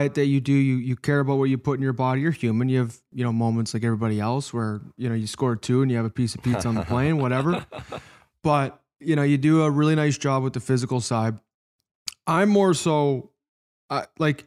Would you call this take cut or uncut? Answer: uncut